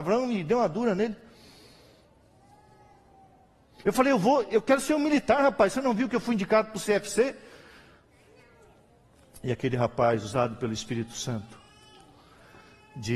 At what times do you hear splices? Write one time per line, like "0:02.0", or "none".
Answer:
none